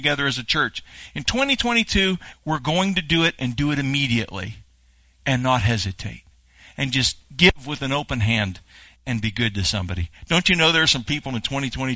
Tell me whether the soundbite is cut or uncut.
cut